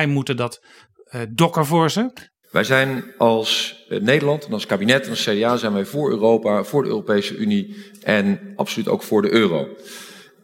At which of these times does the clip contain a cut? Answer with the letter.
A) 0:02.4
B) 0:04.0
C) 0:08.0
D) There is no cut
A